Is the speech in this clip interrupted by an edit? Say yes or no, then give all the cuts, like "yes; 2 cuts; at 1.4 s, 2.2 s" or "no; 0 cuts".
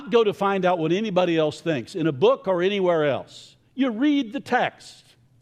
no; 0 cuts